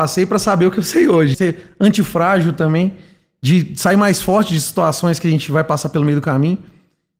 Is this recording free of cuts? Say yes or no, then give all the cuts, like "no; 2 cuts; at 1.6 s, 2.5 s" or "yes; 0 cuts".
no; 1 cut; at 1.3 s